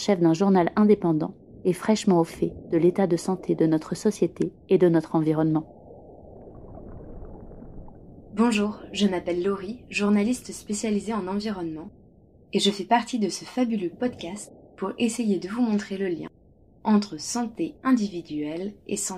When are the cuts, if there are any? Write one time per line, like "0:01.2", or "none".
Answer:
none

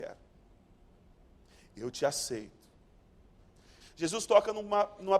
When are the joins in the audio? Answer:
0:03.8

